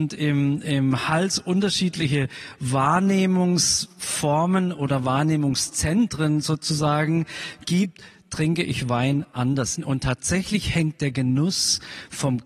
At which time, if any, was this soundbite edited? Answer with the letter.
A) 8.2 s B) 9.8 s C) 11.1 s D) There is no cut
B